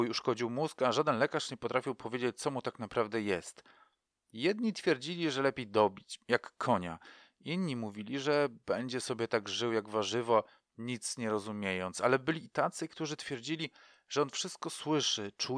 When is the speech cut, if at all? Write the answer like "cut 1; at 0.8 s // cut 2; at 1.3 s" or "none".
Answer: none